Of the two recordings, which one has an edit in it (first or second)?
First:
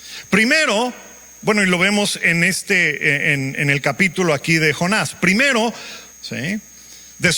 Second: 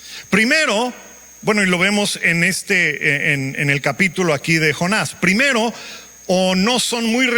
first